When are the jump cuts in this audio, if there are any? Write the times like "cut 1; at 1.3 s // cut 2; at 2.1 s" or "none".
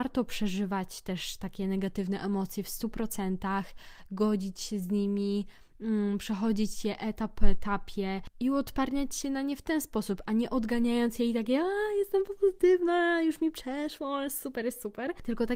none